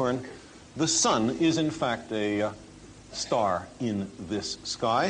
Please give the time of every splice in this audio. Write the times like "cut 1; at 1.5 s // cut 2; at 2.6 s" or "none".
none

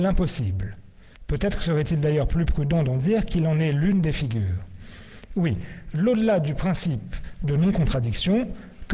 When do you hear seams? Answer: cut 1; at 1.2 s

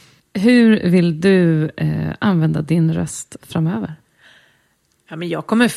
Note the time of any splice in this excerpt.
none

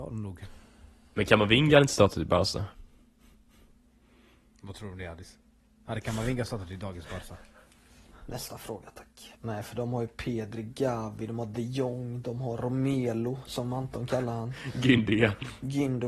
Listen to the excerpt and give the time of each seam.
cut 1; at 9.4 s

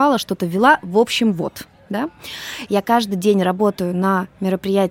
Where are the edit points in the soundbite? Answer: cut 1; at 2.7 s

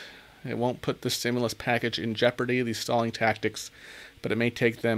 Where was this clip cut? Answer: none

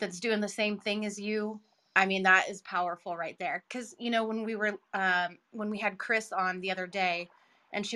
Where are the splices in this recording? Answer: none

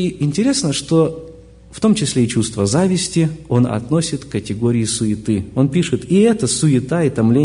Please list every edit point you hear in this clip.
none

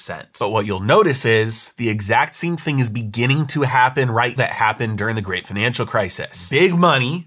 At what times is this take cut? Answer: cut 1; at 4.4 s

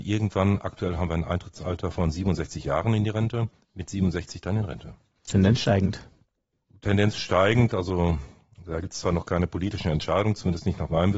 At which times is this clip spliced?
none

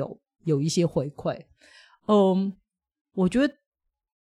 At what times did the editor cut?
none

